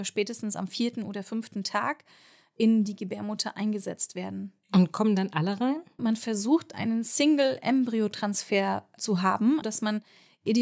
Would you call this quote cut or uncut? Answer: cut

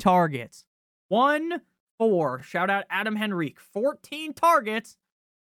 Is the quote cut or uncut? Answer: uncut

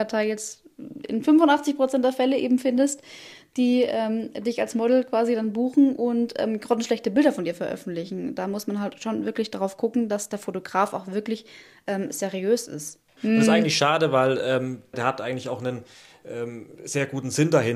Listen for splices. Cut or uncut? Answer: cut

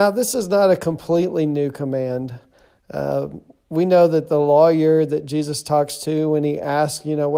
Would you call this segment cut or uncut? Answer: uncut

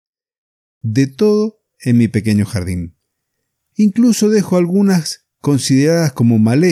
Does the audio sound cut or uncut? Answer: cut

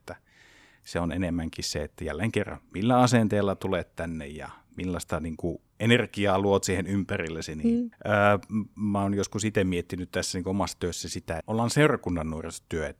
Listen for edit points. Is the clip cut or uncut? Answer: cut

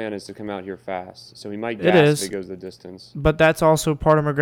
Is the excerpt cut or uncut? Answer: uncut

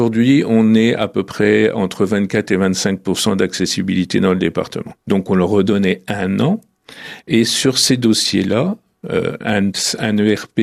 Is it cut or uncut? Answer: cut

